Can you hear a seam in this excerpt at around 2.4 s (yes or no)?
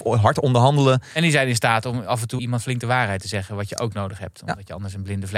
yes